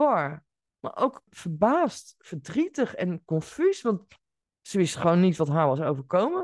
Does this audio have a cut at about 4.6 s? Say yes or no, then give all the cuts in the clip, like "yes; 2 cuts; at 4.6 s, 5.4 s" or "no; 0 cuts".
no; 1 cut; at 1.3 s